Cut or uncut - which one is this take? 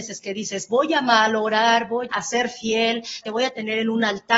cut